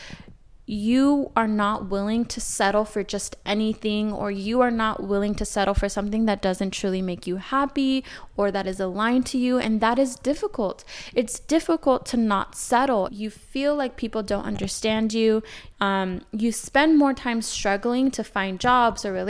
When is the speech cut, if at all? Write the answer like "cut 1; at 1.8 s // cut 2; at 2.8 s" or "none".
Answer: cut 1; at 13.1 s // cut 2; at 15.7 s